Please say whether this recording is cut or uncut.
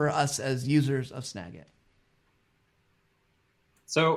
uncut